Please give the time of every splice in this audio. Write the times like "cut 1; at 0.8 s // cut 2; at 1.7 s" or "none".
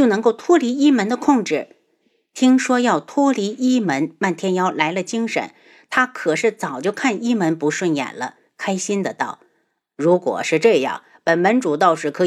none